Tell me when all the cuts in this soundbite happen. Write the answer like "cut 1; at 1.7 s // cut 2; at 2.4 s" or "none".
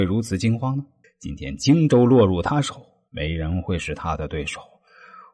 cut 1; at 1.0 s // cut 2; at 3.1 s